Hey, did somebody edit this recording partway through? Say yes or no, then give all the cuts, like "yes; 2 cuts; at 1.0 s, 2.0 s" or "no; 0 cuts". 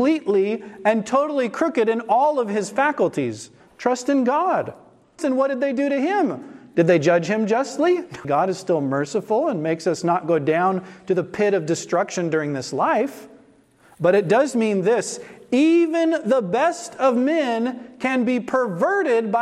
yes; 3 cuts; at 3.6 s, 5.2 s, 8.2 s